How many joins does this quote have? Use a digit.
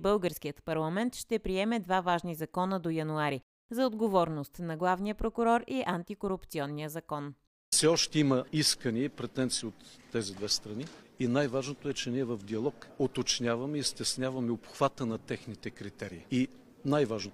1